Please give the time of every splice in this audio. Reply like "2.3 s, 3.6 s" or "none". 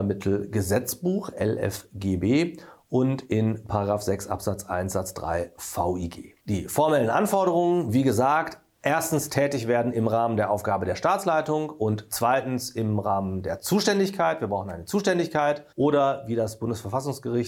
6.4 s, 15.7 s